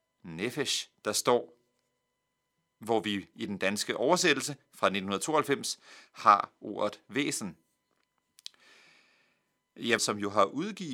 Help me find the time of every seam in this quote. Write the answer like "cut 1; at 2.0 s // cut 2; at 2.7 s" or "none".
cut 1; at 10.0 s